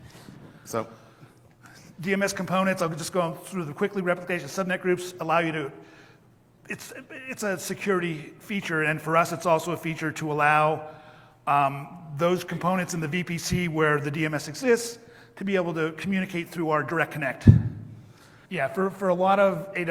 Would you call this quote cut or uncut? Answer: cut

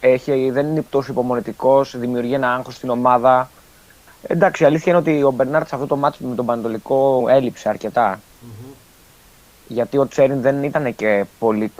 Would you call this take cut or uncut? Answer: cut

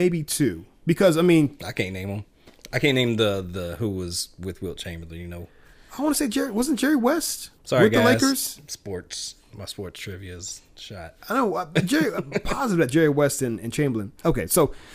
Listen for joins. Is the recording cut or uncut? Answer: cut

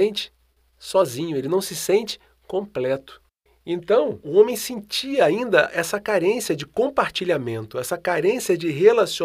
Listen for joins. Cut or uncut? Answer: uncut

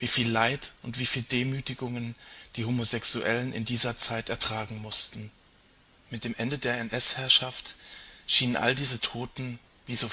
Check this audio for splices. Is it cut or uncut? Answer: uncut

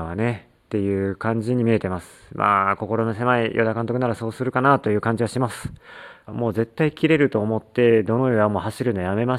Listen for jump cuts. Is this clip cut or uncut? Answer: cut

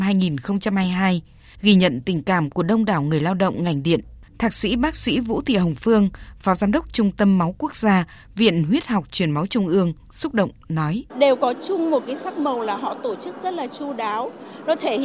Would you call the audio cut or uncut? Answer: cut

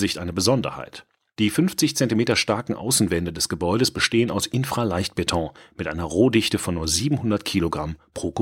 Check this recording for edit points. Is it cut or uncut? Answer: uncut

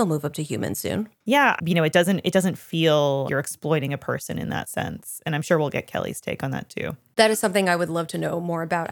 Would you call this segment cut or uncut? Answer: cut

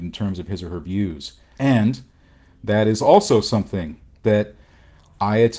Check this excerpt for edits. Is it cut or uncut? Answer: cut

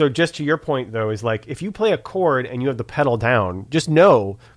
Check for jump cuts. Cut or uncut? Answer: uncut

